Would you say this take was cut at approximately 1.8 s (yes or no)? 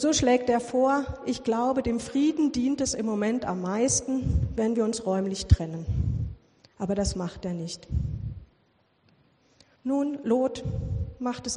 no